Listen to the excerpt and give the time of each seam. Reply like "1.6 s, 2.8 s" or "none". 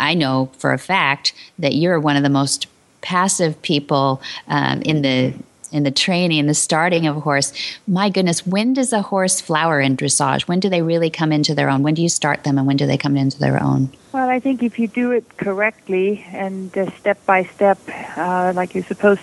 none